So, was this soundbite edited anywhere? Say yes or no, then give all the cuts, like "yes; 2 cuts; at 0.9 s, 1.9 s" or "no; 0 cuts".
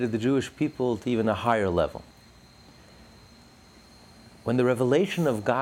no; 0 cuts